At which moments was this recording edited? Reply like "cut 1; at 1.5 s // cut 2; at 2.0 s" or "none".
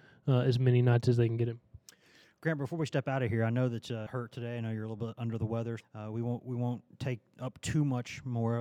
cut 1; at 4.1 s // cut 2; at 5.8 s